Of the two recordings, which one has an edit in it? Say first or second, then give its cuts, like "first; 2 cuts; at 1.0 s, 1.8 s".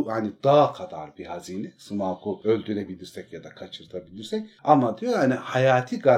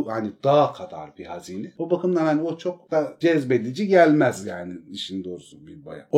second; 1 cut; at 1.8 s